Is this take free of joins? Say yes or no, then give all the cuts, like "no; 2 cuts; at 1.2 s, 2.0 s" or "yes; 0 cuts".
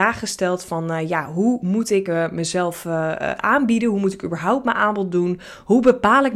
yes; 0 cuts